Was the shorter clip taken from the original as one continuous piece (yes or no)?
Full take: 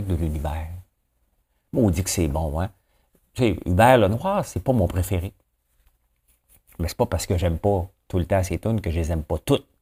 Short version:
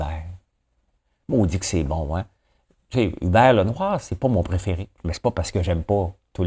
no